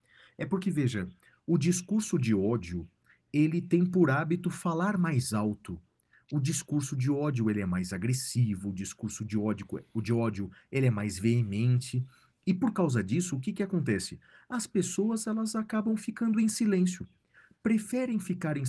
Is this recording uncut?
no; 1 cut; at 1.3 s

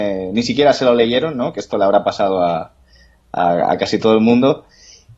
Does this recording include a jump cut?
no; 0 cuts

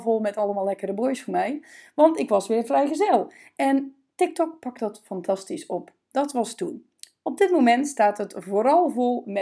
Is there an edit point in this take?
no; 0 cuts

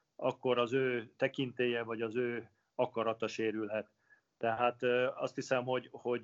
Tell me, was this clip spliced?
no; 0 cuts

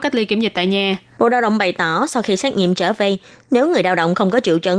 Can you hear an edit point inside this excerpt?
yes; 2 cuts; at 1.2 s, 3.4 s

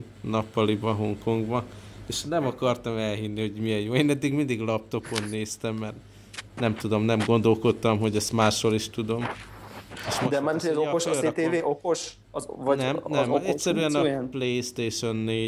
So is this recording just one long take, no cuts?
yes; 0 cuts

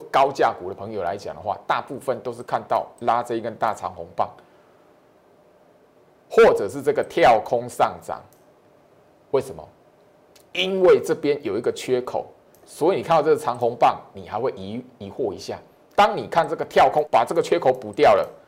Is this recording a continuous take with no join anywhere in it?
no; 1 cut; at 17.0 s

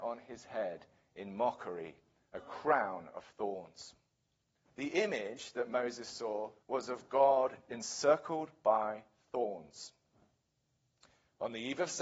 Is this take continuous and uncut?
no; 2 cuts; at 4.6 s, 6.6 s

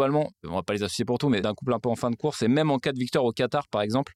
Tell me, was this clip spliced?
no; 0 cuts

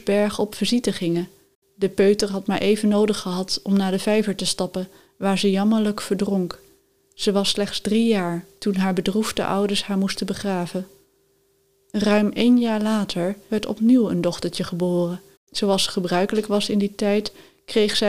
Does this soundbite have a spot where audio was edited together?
yes; 1 cut; at 13.5 s

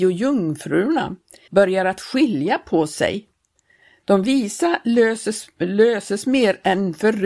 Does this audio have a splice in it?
yes; 1 cut; at 1.5 s

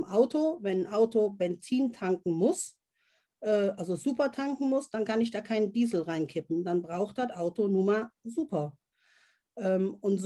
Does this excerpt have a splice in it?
no; 0 cuts

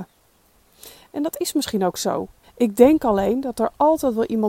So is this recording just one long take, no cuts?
no; 2 cuts; at 1.0 s, 2.4 s

